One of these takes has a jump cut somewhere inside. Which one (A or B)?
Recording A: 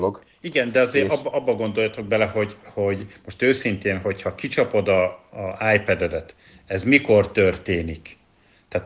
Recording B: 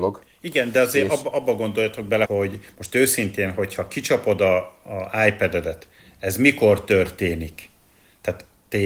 B